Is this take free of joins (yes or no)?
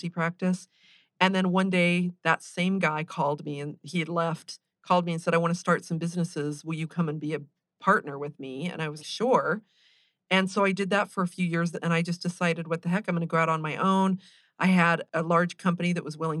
no